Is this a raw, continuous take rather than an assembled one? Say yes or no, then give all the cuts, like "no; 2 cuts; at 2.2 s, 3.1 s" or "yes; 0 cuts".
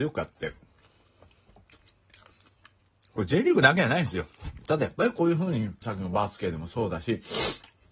no; 2 cuts; at 4.7 s, 5.8 s